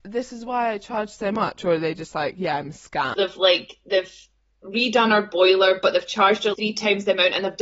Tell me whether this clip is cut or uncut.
cut